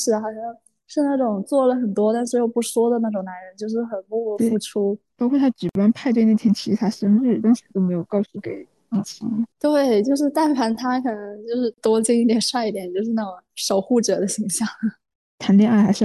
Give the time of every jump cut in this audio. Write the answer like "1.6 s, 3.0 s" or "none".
9.5 s